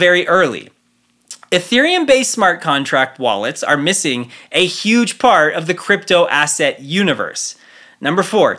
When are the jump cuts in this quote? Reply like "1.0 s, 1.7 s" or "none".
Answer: none